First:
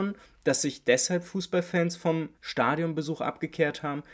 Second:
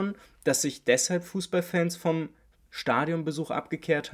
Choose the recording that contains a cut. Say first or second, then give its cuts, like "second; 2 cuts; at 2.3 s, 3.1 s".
first; 1 cut; at 2.3 s